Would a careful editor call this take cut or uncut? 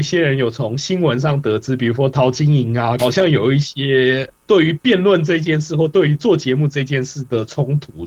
cut